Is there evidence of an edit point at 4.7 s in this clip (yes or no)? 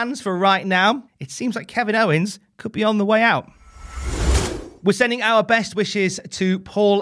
no